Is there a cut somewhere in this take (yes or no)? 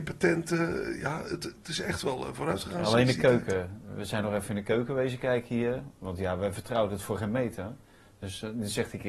no